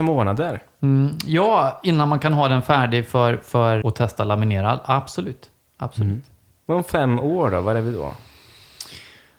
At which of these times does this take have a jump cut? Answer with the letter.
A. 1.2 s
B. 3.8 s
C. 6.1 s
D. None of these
B